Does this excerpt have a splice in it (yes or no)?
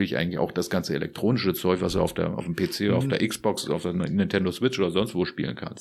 no